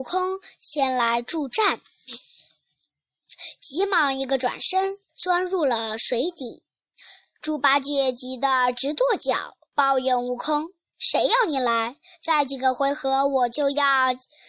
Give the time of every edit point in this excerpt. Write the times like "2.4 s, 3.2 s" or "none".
5.1 s